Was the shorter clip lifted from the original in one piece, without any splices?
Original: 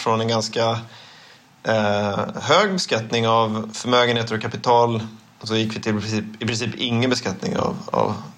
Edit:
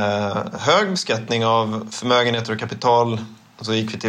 yes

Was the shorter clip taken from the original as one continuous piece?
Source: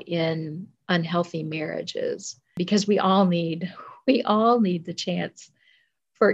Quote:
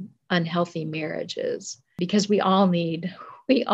yes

